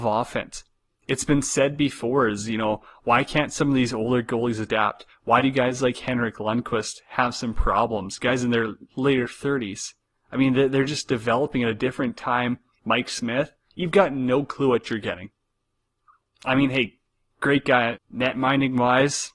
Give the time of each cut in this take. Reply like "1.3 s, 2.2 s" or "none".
10.1 s, 12.8 s, 17.9 s